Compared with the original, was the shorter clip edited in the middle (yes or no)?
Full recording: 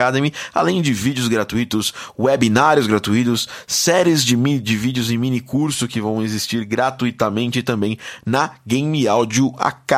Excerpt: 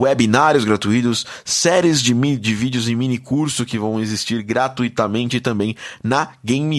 no